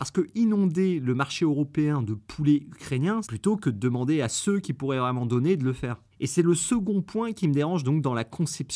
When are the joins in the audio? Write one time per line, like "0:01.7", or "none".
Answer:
0:03.2
0:06.1